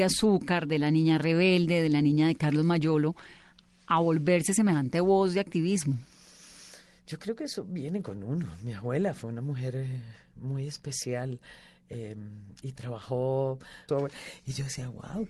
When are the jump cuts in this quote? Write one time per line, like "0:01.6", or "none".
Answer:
0:13.9